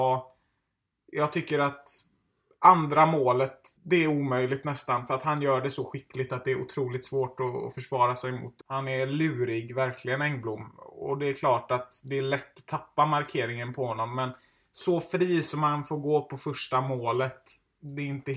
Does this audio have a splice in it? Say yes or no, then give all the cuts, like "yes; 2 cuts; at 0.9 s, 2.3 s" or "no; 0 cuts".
yes; 2 cuts; at 3.8 s, 8.6 s